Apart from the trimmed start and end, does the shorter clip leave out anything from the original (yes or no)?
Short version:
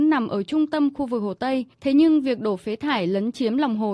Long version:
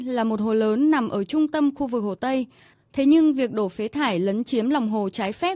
yes